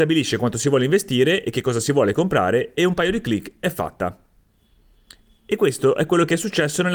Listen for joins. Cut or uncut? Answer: uncut